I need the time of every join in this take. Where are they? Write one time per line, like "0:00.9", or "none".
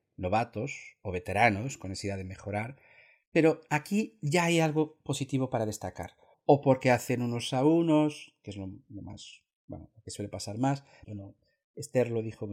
0:06.3
0:11.0